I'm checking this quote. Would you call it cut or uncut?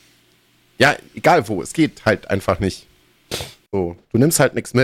cut